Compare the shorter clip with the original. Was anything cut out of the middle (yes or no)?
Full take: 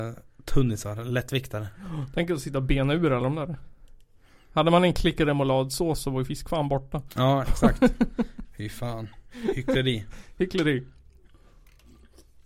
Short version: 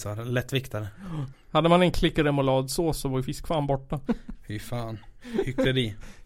yes